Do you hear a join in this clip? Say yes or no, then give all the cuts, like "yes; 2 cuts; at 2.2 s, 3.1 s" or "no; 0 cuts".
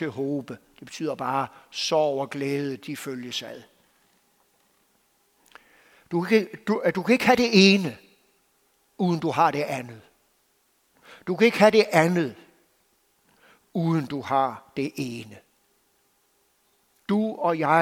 no; 0 cuts